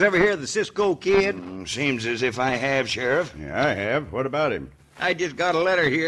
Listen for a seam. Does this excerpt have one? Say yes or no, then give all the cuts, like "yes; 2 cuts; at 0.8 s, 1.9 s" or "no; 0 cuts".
no; 0 cuts